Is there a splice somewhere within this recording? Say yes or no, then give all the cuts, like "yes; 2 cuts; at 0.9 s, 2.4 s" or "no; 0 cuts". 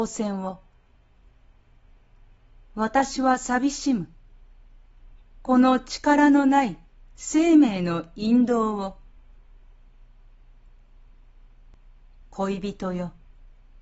no; 0 cuts